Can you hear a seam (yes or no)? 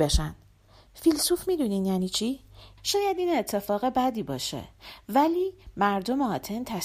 yes